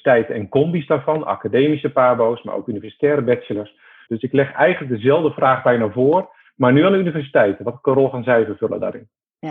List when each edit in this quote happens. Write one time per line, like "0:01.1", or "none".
0:04.1

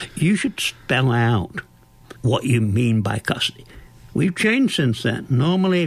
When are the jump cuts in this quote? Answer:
0:02.2
0:04.1

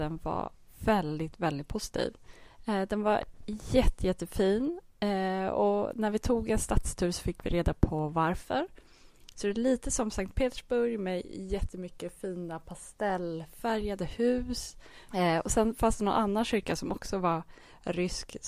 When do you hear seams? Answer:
0:09.3
0:15.1

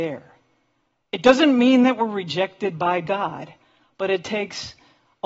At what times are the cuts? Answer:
none

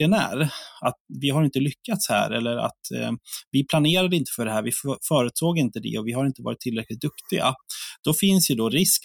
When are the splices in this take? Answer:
none

